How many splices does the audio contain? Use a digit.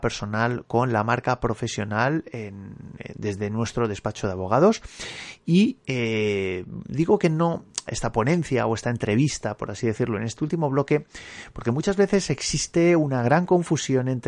1